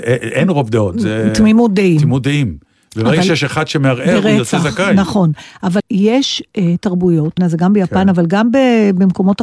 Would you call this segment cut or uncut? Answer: cut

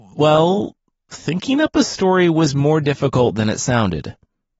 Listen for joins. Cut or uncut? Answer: uncut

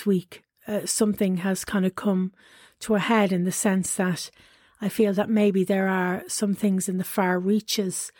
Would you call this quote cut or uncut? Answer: uncut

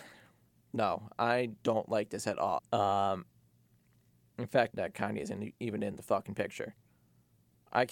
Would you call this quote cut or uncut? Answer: cut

